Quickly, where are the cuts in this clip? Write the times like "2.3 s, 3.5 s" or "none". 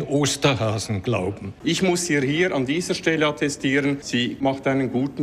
1.6 s